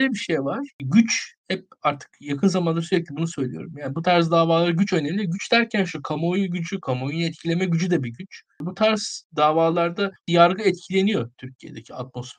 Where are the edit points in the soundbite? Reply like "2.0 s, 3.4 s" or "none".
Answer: none